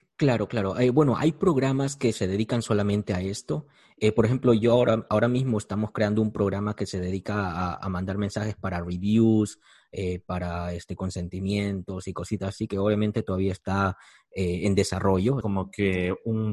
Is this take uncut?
no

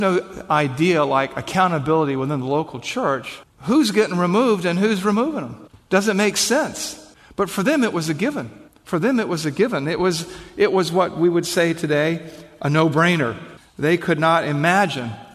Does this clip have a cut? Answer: no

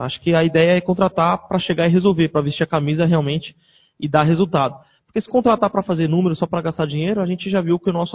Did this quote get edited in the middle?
no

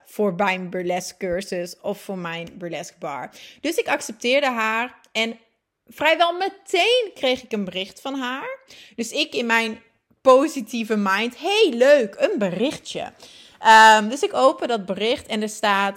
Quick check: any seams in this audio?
no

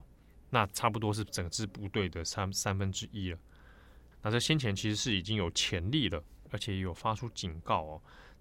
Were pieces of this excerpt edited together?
yes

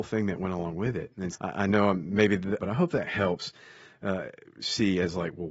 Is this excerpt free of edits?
no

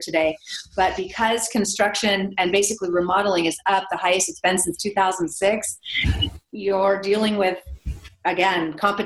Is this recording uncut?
yes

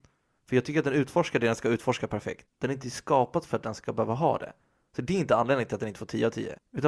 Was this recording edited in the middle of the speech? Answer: yes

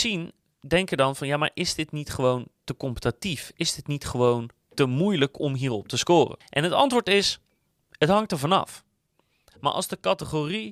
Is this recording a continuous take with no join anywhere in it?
no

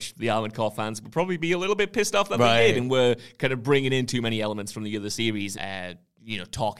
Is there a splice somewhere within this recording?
yes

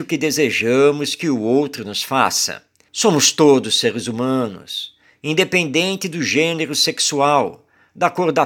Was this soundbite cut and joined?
yes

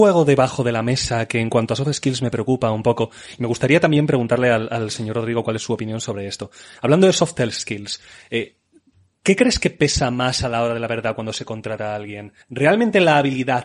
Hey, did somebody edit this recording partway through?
yes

